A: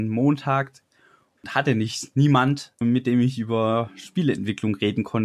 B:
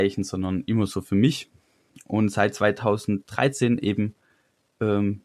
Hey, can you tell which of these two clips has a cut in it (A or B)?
A